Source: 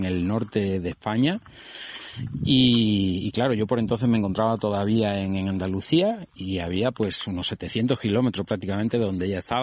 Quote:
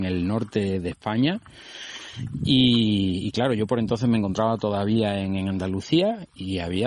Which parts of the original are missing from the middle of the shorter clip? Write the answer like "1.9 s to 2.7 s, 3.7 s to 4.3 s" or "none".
none